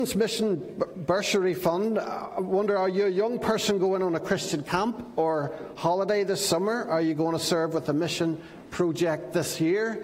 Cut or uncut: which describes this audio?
uncut